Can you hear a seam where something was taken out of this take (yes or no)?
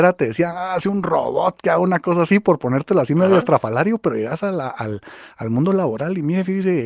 no